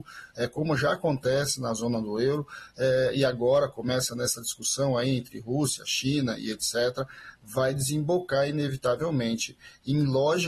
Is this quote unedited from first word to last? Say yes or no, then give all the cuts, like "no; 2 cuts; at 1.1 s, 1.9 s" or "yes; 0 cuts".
yes; 0 cuts